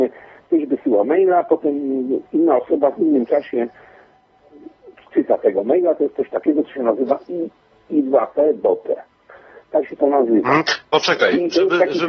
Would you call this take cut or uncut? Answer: uncut